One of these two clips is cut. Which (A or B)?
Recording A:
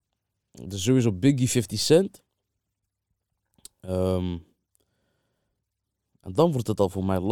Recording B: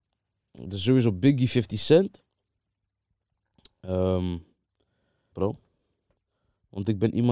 B